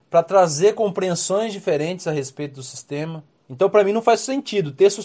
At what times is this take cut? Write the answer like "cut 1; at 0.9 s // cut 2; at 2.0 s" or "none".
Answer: cut 1; at 3.4 s